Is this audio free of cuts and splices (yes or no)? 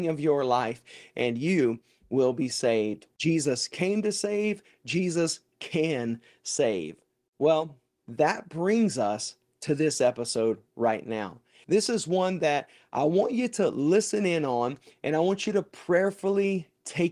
no